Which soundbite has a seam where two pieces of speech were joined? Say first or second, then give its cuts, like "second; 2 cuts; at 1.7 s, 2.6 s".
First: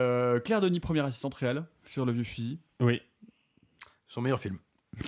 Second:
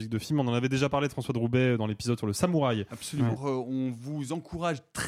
second; 1 cut; at 3.4 s